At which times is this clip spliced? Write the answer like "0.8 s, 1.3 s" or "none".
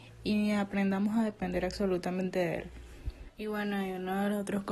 3.3 s